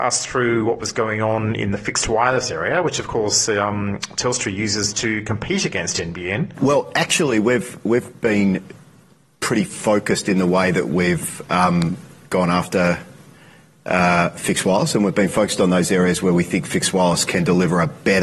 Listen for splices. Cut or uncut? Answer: cut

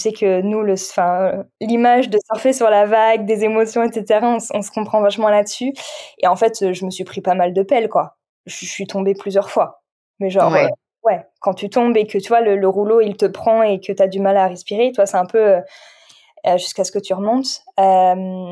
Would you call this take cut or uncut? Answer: uncut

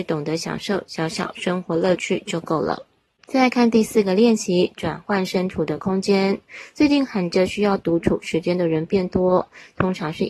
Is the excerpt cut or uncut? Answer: uncut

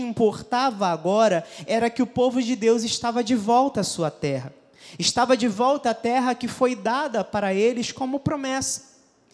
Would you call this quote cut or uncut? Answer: uncut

